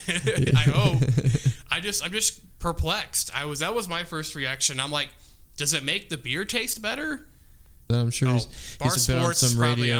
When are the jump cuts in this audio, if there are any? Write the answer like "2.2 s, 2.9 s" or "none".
7.9 s, 9.0 s